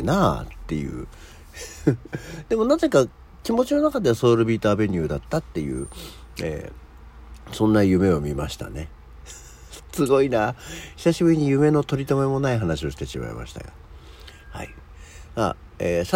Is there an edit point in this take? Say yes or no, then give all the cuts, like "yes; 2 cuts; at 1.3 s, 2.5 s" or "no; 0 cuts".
no; 0 cuts